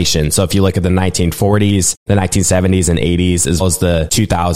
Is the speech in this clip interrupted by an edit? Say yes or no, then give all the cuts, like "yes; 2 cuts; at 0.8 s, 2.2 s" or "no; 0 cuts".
yes; 1 cut; at 3.6 s